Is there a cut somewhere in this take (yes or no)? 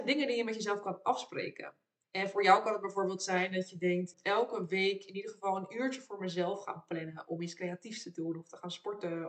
yes